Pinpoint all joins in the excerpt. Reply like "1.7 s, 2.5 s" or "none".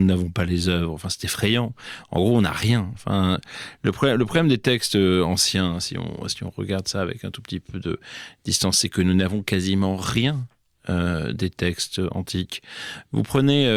2.9 s